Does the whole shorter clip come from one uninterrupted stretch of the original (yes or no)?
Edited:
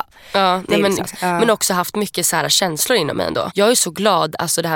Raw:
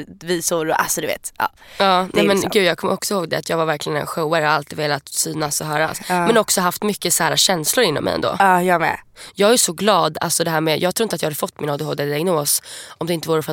no